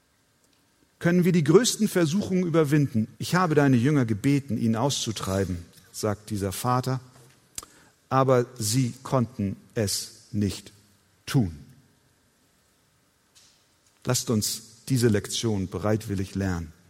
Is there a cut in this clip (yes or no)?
yes